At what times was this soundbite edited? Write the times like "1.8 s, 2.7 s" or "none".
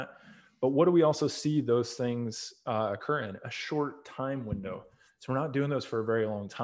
none